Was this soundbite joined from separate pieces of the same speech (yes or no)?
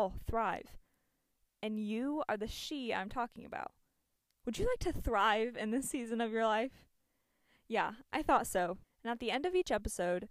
yes